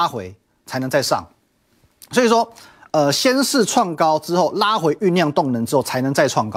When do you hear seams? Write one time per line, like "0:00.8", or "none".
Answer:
none